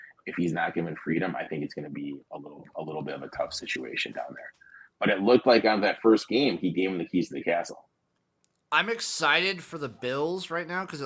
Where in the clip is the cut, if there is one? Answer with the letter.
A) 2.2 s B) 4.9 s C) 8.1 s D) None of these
D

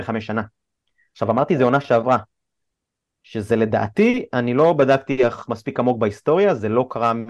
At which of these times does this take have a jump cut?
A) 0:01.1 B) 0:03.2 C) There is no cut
B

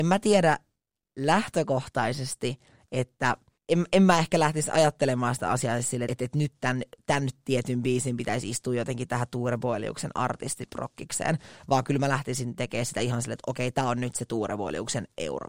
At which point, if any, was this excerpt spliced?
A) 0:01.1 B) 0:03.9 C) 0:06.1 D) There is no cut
C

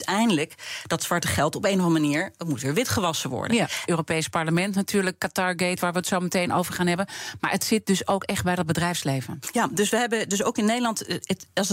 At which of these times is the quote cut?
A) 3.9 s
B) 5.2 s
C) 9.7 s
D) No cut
A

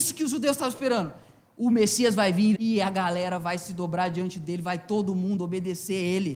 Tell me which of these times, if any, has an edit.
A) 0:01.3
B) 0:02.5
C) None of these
B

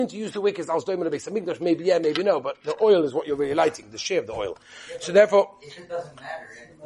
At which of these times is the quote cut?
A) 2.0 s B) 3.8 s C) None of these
C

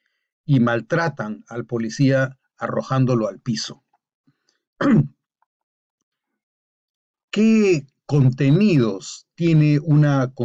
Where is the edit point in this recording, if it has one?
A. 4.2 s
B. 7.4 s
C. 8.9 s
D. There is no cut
A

